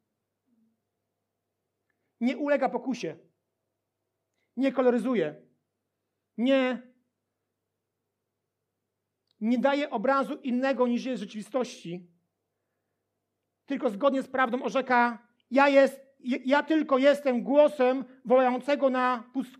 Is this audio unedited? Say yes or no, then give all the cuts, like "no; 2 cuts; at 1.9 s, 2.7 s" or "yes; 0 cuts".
yes; 0 cuts